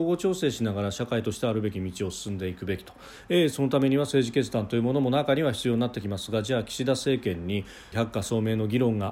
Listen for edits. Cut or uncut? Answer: cut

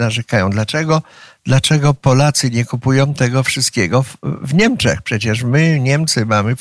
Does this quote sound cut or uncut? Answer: uncut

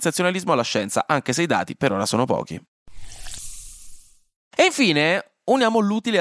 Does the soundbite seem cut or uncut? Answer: uncut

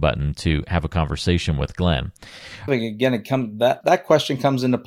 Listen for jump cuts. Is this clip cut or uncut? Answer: cut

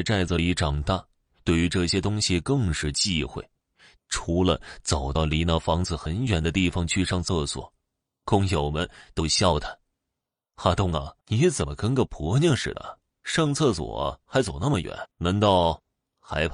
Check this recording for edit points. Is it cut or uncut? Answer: cut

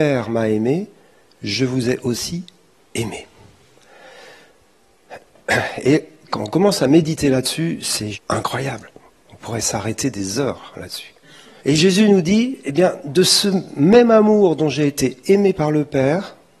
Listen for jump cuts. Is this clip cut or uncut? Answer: cut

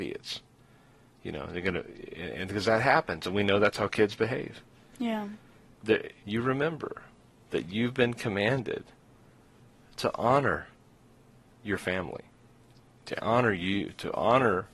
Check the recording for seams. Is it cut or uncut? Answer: cut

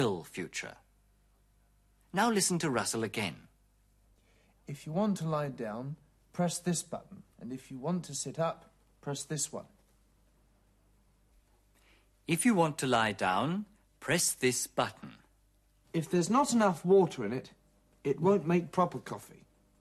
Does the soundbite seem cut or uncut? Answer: cut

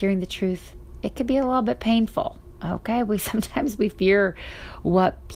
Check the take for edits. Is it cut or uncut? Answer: uncut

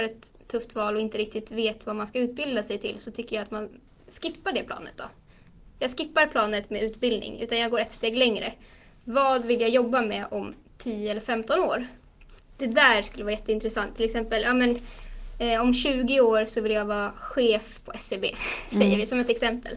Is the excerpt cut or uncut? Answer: uncut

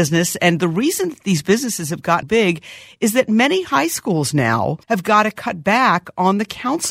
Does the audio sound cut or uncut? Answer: cut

